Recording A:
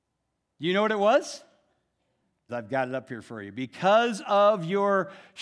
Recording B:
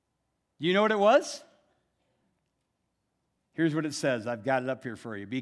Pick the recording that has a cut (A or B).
A